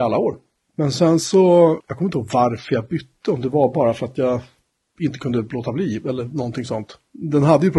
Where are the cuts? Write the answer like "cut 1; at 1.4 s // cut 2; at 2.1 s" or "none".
none